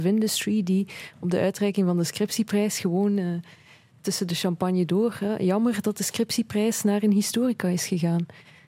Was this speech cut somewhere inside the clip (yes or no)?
no